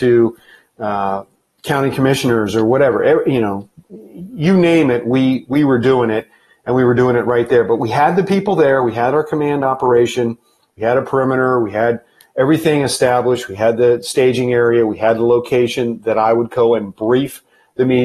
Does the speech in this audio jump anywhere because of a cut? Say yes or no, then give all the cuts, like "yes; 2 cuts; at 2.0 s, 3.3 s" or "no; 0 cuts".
no; 0 cuts